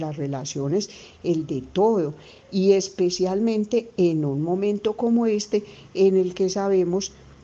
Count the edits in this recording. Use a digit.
0